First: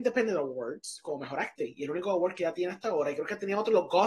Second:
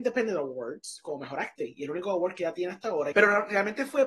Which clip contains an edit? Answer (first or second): second